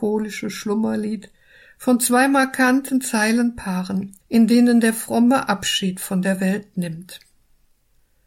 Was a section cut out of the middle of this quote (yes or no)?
yes